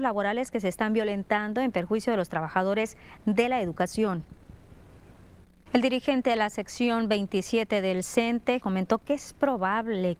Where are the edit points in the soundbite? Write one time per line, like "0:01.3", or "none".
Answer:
0:05.6
0:08.6